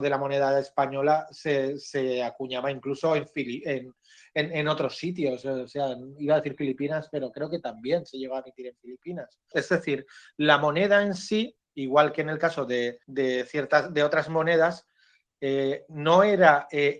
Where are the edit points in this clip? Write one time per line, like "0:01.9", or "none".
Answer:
0:09.5
0:13.0

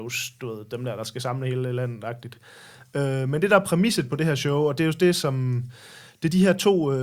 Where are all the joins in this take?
none

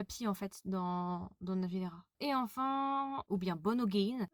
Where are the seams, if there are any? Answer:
0:03.3

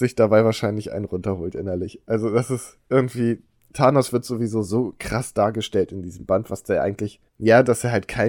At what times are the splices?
0:07.3

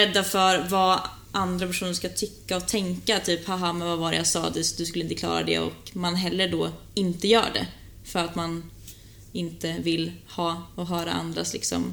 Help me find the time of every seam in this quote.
none

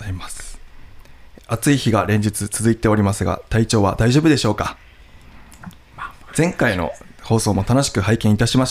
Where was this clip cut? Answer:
0:06.3

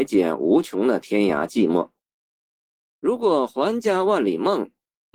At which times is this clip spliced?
none

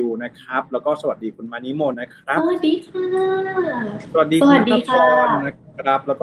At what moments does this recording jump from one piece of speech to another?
0:01.9

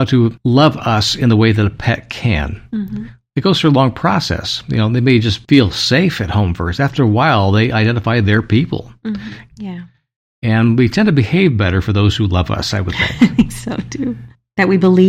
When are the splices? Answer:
0:09.5

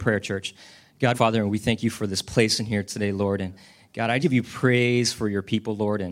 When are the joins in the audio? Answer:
0:01.1
0:04.2

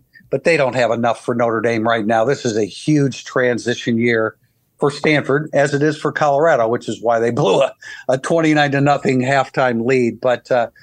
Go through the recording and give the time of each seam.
none

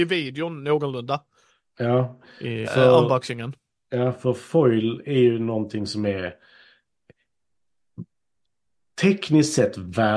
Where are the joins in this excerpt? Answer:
0:02.6

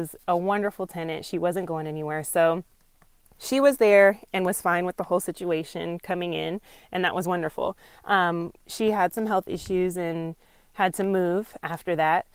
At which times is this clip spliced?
none

